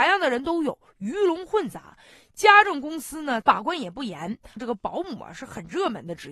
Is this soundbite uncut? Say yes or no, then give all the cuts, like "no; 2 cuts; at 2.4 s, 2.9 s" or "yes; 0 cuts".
no; 2 cuts; at 3.4 s, 4.6 s